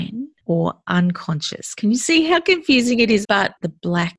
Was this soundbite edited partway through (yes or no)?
yes